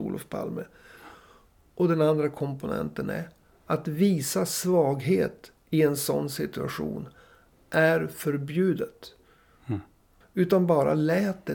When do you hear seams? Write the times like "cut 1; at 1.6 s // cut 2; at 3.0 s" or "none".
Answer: cut 1; at 10.2 s